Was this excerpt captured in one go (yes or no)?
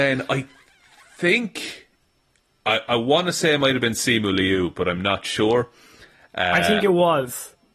yes